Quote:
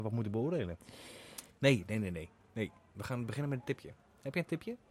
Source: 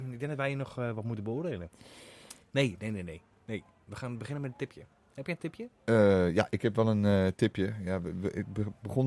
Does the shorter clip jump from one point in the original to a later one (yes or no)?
no